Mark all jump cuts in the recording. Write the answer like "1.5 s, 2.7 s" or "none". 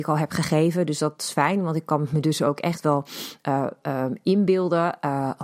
none